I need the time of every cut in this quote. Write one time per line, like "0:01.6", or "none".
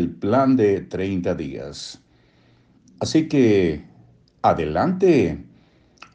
none